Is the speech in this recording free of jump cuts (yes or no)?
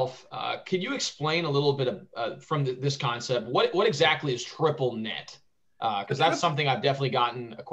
yes